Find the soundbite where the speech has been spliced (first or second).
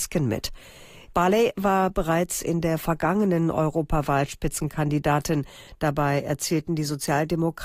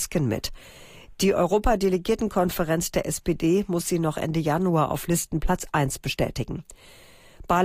first